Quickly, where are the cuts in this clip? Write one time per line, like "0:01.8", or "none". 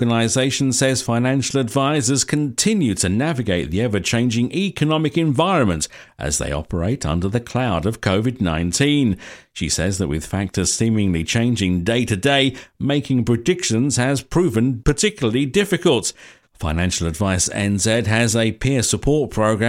0:16.4